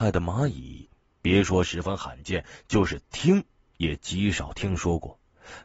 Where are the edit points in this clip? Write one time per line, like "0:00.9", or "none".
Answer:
none